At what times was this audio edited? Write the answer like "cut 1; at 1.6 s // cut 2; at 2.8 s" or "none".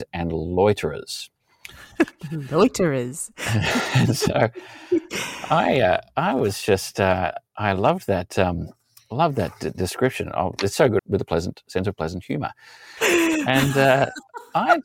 cut 1; at 11.0 s // cut 2; at 13.0 s